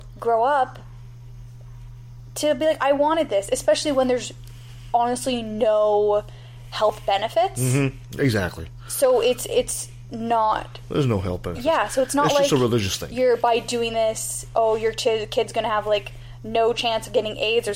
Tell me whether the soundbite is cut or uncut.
uncut